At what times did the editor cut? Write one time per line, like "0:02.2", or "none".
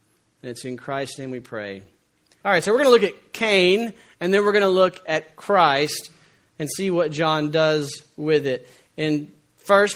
0:02.4